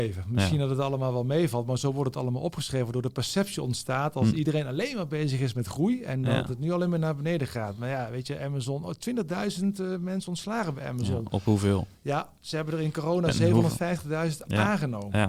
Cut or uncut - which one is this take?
uncut